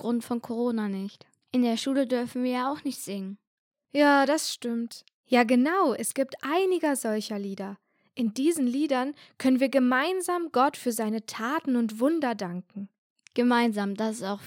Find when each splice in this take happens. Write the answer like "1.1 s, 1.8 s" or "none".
5.2 s